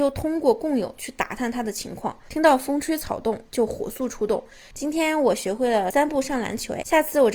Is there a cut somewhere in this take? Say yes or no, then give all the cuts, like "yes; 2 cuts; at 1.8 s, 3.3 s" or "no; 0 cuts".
yes; 1 cut; at 4.7 s